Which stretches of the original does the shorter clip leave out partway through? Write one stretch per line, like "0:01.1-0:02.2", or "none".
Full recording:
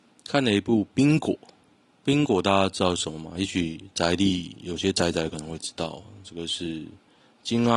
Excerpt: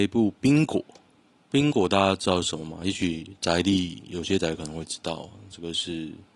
0:04.9-0:05.1